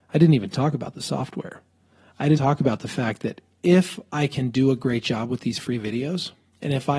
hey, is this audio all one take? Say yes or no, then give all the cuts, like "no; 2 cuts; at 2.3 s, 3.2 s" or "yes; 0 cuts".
no; 1 cut; at 2.4 s